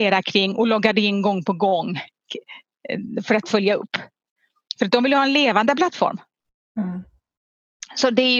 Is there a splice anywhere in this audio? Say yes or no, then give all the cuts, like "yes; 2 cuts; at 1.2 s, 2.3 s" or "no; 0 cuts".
no; 0 cuts